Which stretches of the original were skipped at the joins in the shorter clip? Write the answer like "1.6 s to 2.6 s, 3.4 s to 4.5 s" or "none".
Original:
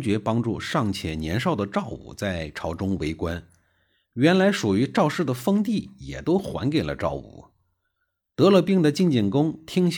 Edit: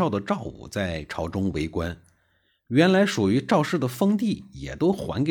none